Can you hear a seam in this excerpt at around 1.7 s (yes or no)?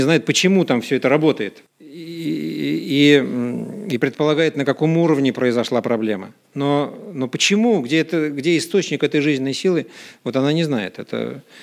yes